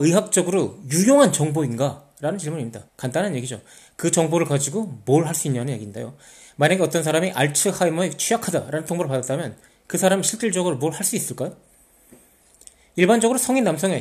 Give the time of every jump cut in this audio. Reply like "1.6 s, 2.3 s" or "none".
2.9 s